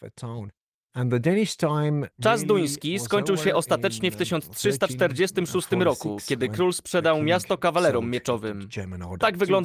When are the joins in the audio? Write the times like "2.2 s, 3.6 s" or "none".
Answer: none